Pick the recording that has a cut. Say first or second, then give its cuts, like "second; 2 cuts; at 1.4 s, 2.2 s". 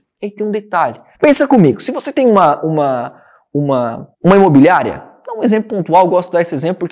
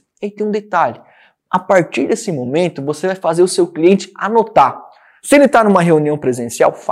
first; 2 cuts; at 1.1 s, 4.1 s